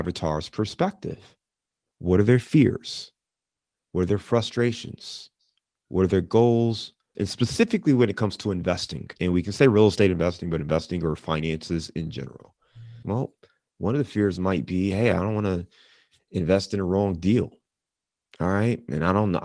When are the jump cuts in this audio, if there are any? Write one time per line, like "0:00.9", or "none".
0:07.1
0:09.2
0:13.0